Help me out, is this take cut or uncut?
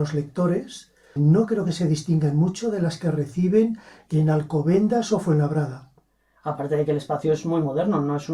cut